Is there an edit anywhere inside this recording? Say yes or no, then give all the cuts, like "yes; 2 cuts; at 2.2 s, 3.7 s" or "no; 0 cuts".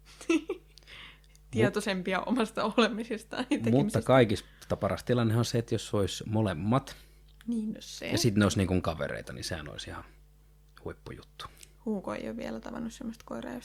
no; 0 cuts